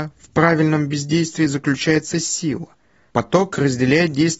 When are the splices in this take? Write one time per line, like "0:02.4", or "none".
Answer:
0:03.1